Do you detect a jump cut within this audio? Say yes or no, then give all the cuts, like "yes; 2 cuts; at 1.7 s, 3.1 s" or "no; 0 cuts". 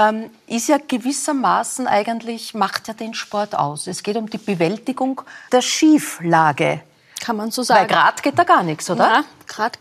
yes; 1 cut; at 5.5 s